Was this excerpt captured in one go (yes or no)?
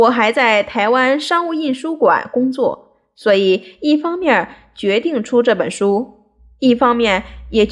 yes